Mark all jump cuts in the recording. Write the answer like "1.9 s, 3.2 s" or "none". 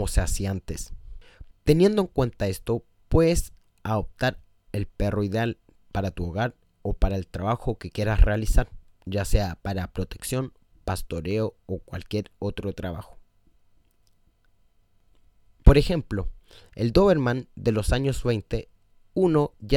1.5 s, 15.6 s